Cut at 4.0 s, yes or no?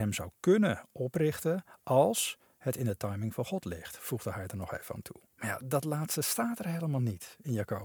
no